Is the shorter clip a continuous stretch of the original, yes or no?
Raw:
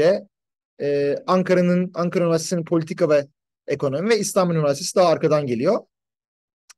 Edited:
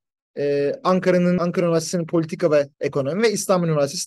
no